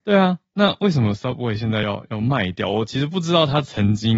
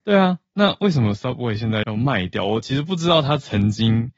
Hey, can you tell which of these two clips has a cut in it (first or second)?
second